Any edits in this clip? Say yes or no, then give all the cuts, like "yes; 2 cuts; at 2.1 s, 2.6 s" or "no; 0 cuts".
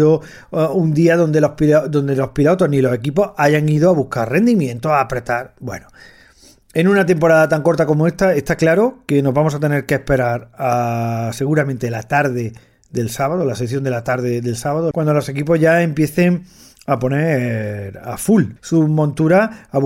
yes; 2 cuts; at 14.9 s, 18.6 s